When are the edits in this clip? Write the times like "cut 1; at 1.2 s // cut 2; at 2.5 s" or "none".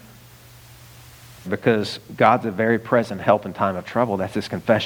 cut 1; at 1.4 s